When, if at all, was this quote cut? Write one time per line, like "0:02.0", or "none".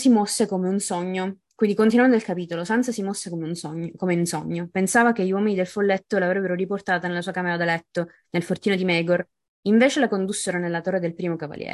none